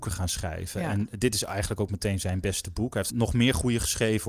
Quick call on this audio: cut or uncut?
cut